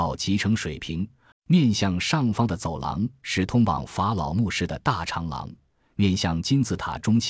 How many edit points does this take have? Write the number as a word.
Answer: one